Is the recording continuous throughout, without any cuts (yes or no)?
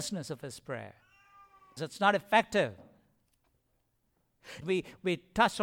no